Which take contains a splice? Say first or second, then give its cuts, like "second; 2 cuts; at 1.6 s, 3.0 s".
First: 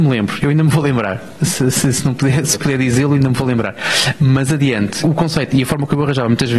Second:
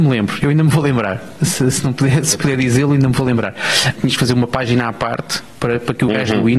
second; 2 cuts; at 1.7 s, 4.0 s